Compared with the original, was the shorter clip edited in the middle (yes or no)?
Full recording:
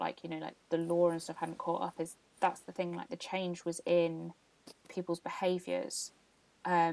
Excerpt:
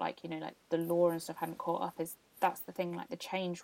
no